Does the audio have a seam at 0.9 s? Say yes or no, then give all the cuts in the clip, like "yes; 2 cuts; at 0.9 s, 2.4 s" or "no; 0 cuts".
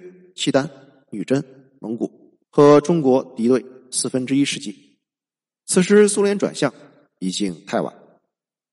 no; 1 cut; at 2.4 s